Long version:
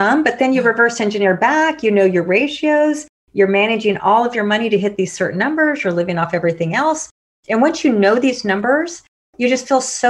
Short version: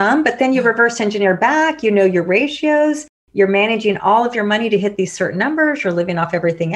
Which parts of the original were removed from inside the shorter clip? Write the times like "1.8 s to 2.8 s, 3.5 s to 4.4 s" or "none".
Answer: none